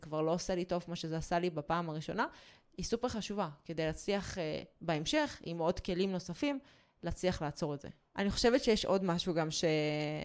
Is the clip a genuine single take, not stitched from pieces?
yes; 0 cuts

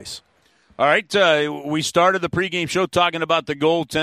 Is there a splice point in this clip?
no; 0 cuts

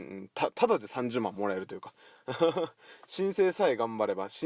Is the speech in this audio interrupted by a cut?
no; 0 cuts

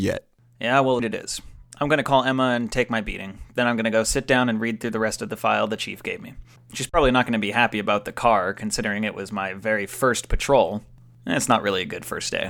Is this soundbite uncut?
no; 2 cuts; at 1.0 s, 6.6 s

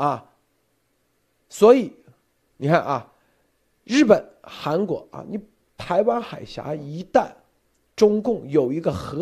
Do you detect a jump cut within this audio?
no; 0 cuts

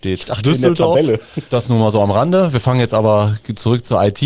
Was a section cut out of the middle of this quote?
yes; 1 cut; at 1.5 s

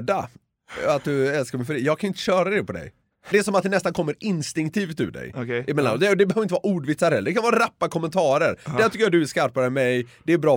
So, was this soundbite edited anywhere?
yes; 1 cut; at 3.3 s

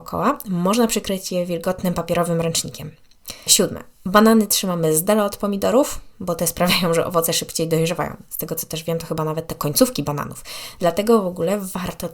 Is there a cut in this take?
yes; 1 cut; at 3.5 s

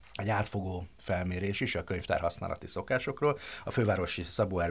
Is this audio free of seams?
yes; 0 cuts

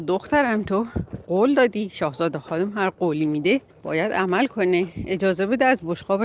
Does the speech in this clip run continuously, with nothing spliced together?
no; 1 cut; at 3.7 s

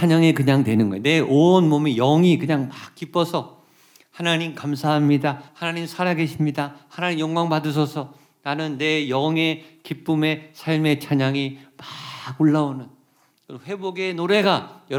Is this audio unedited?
no; 1 cut; at 5.5 s

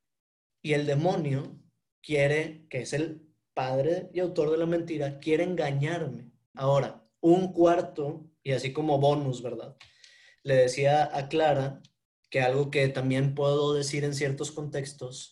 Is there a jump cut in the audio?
yes; 1 cut; at 6.5 s

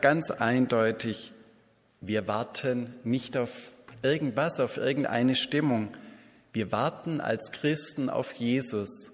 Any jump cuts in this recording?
no; 0 cuts

